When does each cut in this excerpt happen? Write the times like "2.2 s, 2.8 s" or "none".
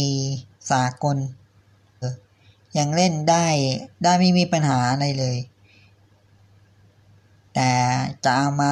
2.0 s, 3.9 s

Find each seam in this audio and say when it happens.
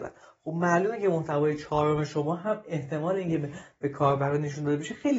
none

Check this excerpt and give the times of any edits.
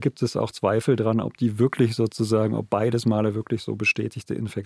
none

